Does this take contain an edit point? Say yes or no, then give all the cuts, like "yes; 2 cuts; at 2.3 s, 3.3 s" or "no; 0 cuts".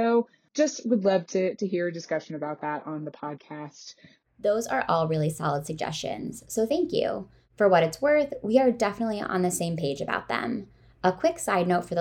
no; 0 cuts